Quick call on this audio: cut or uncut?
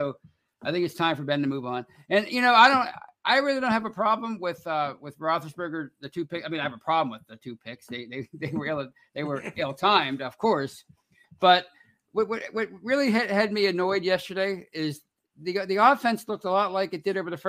uncut